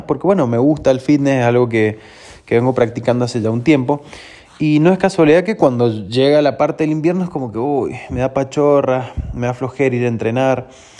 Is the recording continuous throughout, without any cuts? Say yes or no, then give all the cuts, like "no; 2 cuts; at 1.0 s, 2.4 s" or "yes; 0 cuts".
yes; 0 cuts